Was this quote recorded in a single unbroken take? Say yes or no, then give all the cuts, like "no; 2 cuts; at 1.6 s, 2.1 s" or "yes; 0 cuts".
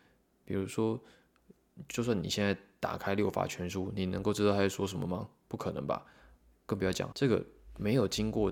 no; 1 cut; at 7.1 s